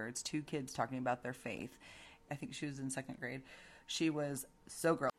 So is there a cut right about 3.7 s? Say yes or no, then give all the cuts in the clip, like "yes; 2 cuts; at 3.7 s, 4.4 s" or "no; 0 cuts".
no; 1 cut; at 2.3 s